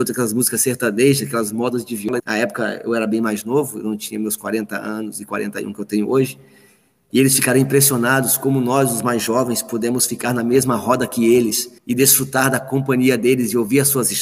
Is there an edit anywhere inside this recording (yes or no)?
yes